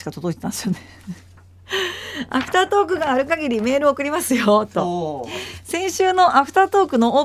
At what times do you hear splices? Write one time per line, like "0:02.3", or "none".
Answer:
none